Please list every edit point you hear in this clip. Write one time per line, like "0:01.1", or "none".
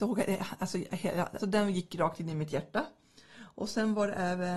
0:01.4